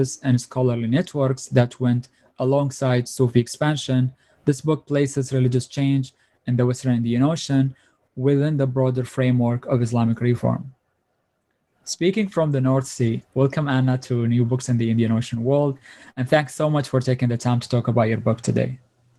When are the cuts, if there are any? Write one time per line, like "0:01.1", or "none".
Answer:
none